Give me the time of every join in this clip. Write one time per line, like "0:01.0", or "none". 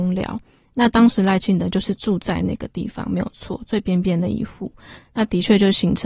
0:05.0